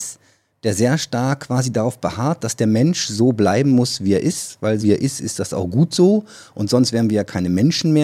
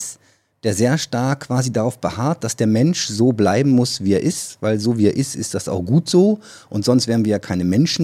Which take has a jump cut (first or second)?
first